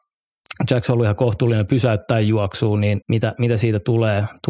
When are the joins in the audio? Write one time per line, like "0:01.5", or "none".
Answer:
0:03.0